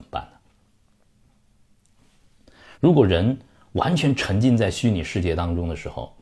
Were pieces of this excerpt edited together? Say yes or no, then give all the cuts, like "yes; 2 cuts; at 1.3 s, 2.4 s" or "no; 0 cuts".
yes; 1 cut; at 2.7 s